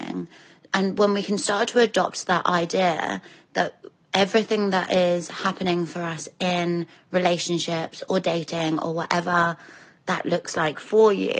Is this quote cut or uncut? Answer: uncut